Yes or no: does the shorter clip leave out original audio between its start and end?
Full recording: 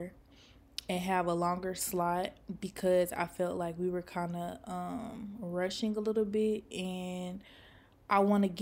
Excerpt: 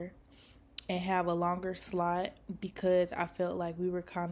no